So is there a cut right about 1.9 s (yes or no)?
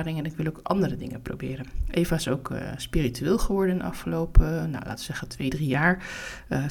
no